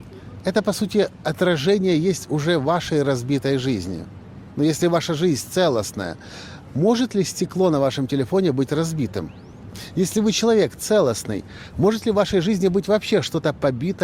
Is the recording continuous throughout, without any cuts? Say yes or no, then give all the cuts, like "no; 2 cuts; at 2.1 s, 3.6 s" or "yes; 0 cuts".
yes; 0 cuts